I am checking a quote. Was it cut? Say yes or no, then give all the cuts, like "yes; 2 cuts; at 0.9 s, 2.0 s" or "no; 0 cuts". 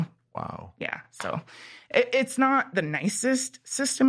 no; 0 cuts